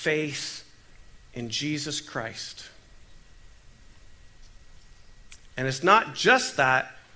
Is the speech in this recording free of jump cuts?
yes; 0 cuts

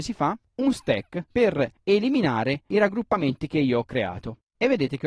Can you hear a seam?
yes; 1 cut; at 1.3 s

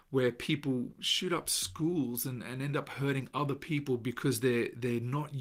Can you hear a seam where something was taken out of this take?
yes; 1 cut; at 0.9 s

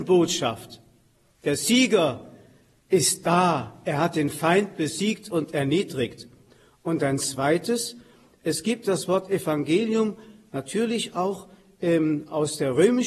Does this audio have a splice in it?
no; 0 cuts

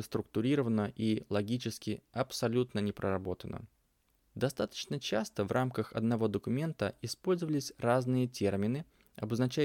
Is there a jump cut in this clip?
yes; 1 cut; at 4.3 s

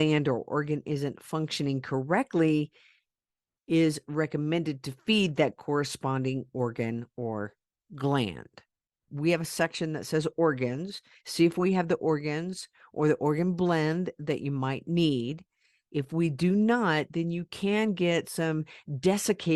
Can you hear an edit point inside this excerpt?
yes; 1 cut; at 9.1 s

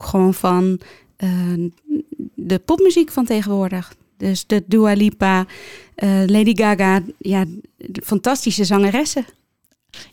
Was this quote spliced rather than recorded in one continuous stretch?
no; 0 cuts

